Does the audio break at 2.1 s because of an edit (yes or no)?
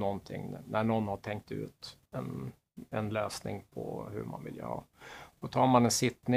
yes